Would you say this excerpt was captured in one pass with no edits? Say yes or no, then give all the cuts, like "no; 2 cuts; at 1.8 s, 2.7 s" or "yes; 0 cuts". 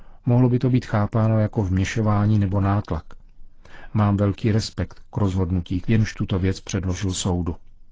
no; 1 cut; at 5.8 s